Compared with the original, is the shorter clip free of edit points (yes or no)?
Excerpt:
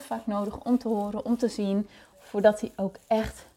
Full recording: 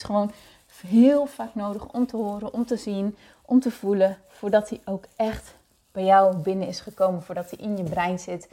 no